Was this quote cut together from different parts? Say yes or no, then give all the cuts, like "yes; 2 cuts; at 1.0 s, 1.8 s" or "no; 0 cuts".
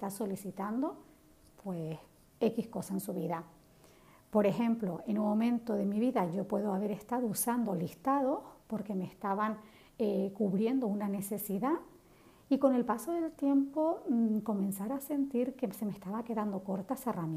no; 0 cuts